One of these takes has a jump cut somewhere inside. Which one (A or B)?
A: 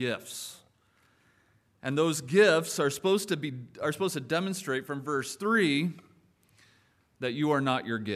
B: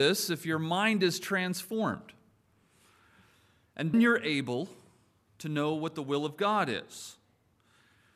B